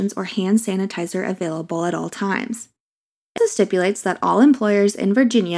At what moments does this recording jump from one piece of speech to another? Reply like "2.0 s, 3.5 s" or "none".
3.4 s